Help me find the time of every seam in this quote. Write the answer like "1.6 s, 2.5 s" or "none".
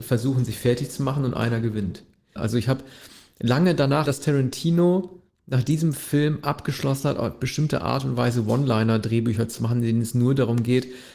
2.4 s, 4.0 s